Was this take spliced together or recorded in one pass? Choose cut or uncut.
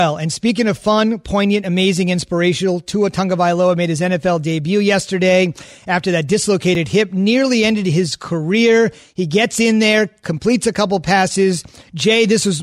uncut